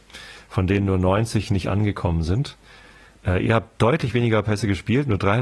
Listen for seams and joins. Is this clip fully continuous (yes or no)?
yes